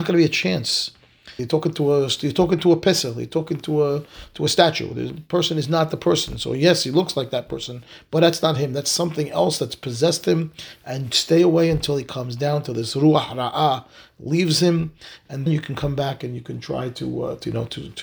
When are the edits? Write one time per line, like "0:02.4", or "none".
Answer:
0:01.4
0:15.5